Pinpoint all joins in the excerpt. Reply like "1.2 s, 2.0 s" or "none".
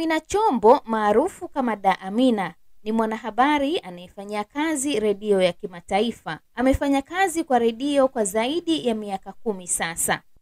6.4 s